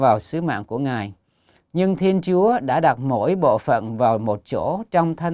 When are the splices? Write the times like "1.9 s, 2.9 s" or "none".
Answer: 1.6 s